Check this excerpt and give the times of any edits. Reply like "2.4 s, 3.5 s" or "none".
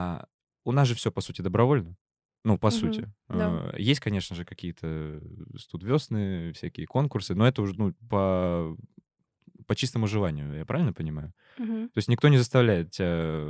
none